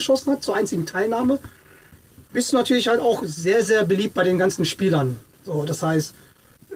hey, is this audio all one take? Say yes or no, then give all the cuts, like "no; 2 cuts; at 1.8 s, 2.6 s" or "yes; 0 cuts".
yes; 0 cuts